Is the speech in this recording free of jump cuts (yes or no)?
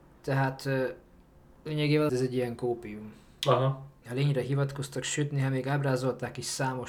no